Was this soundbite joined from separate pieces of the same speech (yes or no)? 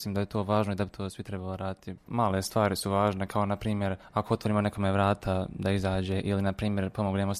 yes